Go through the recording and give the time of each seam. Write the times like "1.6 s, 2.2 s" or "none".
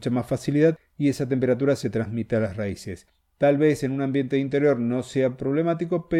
none